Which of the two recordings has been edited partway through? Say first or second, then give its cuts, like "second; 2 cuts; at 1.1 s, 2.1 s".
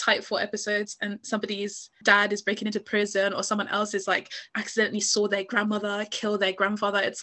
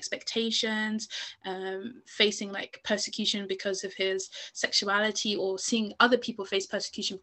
first; 1 cut; at 2.0 s